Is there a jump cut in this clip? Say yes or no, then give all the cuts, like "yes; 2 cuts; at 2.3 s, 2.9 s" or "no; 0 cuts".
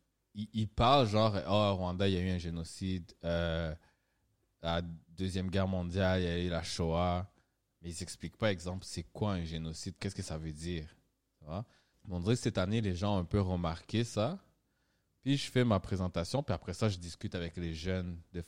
yes; 3 cuts; at 10.0 s, 11.9 s, 15.2 s